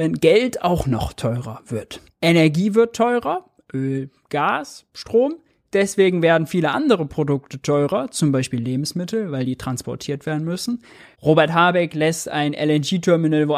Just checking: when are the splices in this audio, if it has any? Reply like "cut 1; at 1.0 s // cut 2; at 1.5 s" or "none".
cut 1; at 2.1 s // cut 2; at 11.1 s